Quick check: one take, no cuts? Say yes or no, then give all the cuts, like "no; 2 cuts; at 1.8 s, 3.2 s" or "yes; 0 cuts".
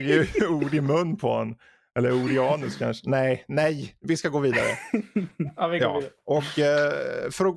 yes; 0 cuts